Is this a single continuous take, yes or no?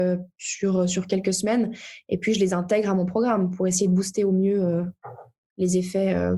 yes